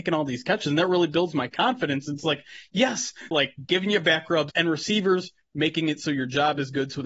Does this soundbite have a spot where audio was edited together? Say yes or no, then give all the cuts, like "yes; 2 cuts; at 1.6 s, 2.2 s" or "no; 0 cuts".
yes; 2 cuts; at 3.3 s, 4.5 s